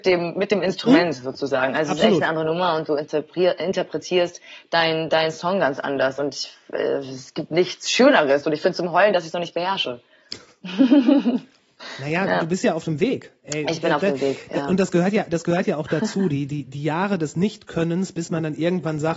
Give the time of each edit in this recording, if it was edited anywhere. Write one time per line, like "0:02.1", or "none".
none